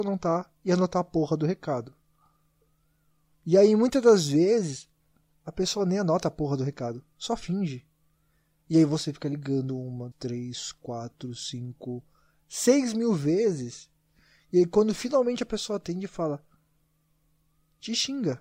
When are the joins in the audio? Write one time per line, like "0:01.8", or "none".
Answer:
0:10.1